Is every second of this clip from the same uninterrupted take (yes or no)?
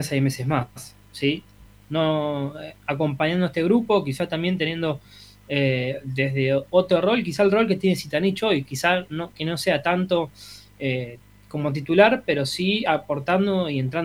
no